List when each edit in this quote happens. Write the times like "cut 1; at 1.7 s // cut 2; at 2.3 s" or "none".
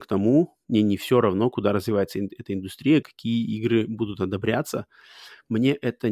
cut 1; at 3.0 s